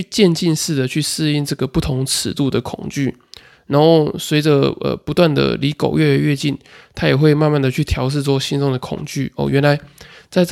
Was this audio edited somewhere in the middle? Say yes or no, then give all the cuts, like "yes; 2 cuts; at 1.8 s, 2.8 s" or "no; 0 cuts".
no; 0 cuts